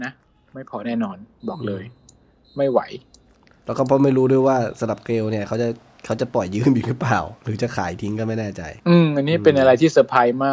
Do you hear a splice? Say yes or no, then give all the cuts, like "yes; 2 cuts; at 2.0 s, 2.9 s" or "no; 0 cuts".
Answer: yes; 1 cut; at 8.8 s